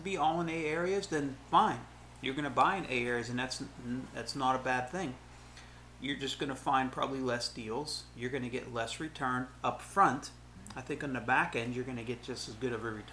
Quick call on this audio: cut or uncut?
uncut